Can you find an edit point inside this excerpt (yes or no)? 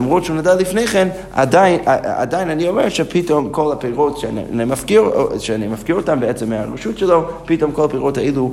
no